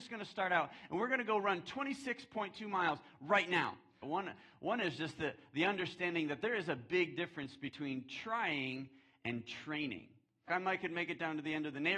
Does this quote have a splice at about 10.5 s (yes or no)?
yes